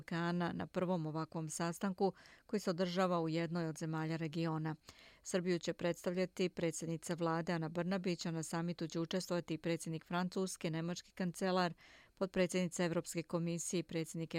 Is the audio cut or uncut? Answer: uncut